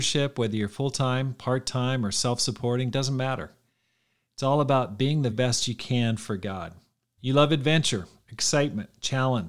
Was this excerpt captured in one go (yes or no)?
no